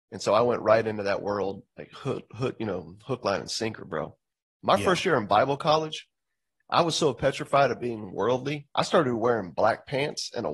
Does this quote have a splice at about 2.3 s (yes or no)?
no